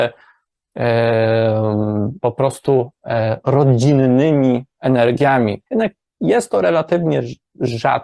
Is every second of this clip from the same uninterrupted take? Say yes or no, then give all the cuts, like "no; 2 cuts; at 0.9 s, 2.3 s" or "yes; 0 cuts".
no; 1 cut; at 5.7 s